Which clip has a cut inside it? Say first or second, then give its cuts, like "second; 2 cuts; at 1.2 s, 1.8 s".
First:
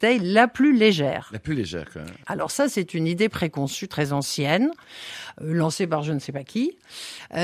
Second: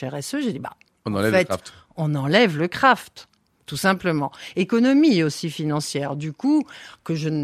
first; 1 cut; at 2.2 s